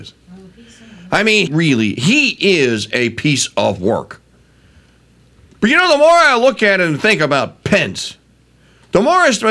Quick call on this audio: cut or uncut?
cut